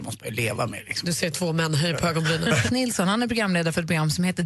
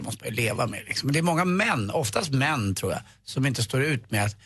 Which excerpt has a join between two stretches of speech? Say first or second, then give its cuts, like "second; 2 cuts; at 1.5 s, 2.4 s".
first; 2 cuts; at 1.0 s, 2.7 s